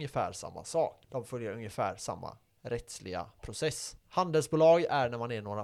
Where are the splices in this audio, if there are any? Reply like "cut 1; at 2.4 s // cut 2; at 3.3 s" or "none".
cut 1; at 4.0 s